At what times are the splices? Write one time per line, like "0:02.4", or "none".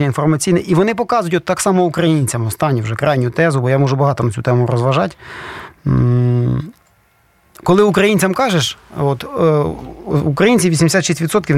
none

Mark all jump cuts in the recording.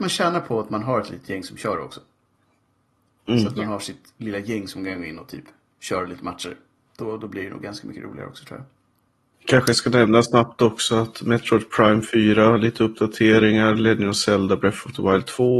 none

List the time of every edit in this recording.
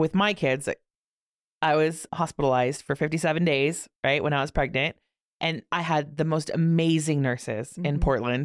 0:02.1

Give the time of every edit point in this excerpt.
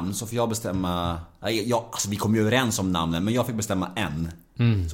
none

